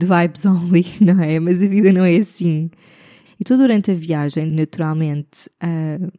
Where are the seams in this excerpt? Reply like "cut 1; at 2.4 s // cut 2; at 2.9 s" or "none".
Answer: cut 1; at 3.3 s // cut 2; at 4.5 s